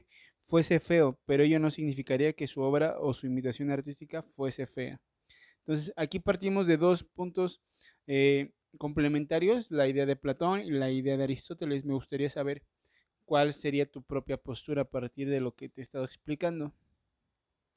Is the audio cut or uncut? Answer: uncut